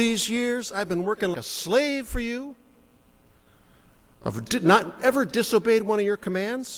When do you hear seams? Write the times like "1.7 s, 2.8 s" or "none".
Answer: 1.3 s